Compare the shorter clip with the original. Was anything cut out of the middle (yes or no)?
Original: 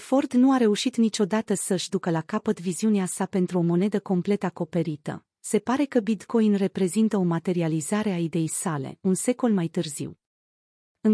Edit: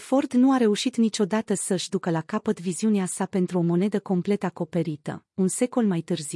yes